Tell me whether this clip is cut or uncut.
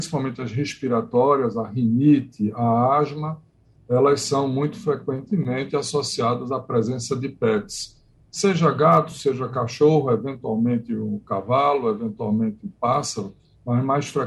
uncut